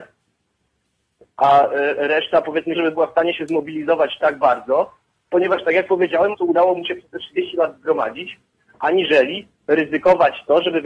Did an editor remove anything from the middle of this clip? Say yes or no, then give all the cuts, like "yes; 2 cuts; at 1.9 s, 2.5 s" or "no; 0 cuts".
yes; 2 cuts; at 2.7 s, 6.3 s